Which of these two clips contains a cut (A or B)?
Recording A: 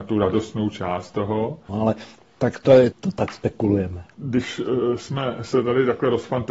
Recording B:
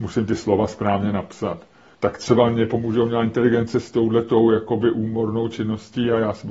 A